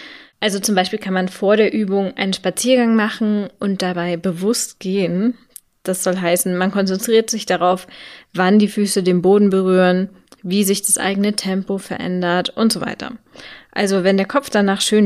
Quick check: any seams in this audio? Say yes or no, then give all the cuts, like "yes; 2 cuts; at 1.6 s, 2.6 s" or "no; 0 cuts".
no; 0 cuts